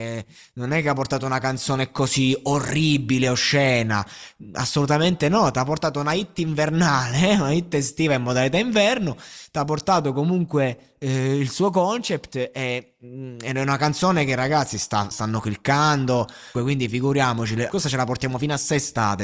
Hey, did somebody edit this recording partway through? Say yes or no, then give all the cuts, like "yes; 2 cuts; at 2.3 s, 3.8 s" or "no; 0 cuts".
yes; 3 cuts; at 15.1 s, 16.5 s, 17.7 s